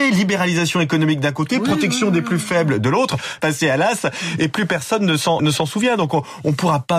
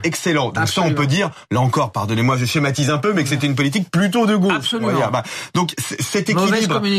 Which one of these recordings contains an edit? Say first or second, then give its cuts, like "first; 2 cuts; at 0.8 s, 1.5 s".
first; 2 cuts; at 3.4 s, 5.4 s